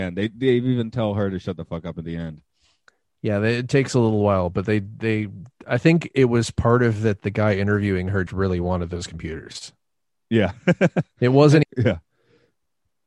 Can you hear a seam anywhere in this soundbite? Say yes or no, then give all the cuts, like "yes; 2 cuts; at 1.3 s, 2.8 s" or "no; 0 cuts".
yes; 2 cuts; at 8.3 s, 11.6 s